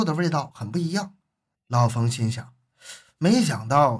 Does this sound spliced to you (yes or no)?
yes